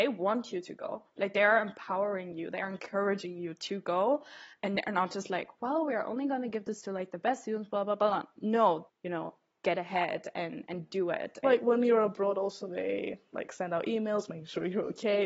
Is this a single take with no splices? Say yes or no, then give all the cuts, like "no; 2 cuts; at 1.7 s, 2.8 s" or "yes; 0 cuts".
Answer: no; 2 cuts; at 8.9 s, 11.4 s